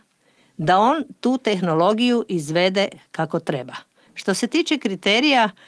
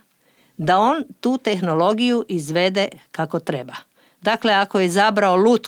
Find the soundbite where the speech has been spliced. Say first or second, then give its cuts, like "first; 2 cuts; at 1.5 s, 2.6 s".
first; 1 cut; at 4.1 s